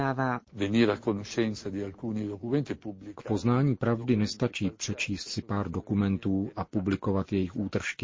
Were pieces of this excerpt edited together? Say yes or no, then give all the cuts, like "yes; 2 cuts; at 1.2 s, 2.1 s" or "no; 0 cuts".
no; 0 cuts